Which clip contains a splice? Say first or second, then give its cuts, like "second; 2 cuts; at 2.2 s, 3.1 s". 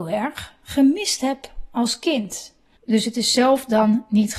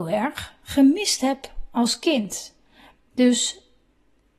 first; 1 cut; at 2.7 s